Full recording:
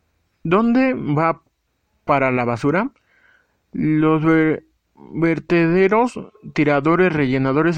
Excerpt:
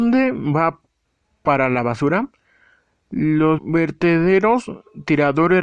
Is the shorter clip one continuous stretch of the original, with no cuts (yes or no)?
no